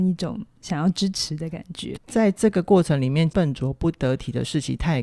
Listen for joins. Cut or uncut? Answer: cut